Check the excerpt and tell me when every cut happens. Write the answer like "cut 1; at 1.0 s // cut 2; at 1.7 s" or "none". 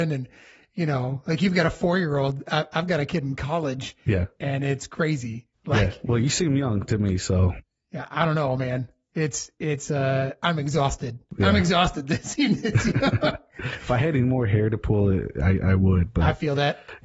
none